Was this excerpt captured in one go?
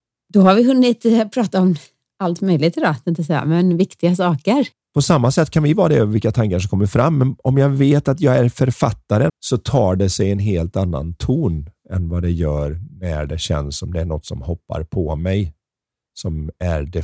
no; 2 cuts; at 4.8 s, 9.3 s

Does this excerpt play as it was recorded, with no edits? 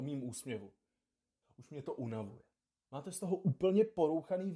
no; 2 cuts; at 1.4 s, 2.9 s

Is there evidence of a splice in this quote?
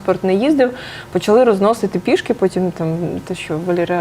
no; 0 cuts

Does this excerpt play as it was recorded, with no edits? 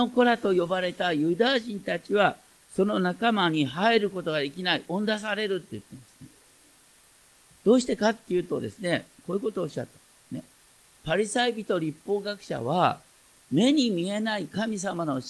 no; 1 cut; at 9.2 s

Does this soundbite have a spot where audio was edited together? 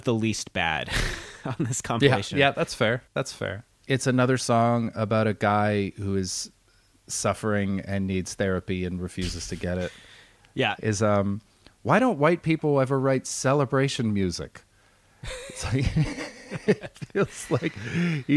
yes; 2 cuts; at 10.8 s, 16.9 s

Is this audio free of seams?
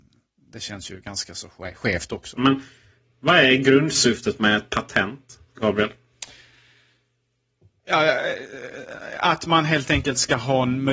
no; 1 cut; at 2.4 s

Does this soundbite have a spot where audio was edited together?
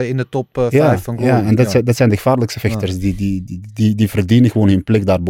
no; 0 cuts

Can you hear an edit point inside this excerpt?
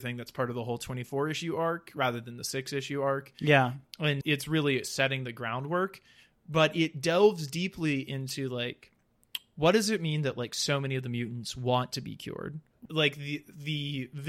yes; 2 cuts; at 4.2 s, 12.9 s

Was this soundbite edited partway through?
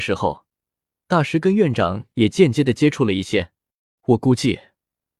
yes; 1 cut; at 4.0 s

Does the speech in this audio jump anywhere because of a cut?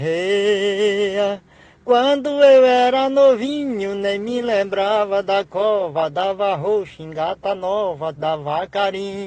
yes; 1 cut; at 8.2 s

